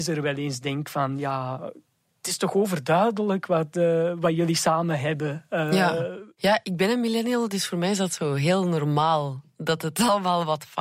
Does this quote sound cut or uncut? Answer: uncut